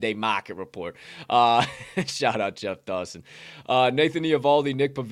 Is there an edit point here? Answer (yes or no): no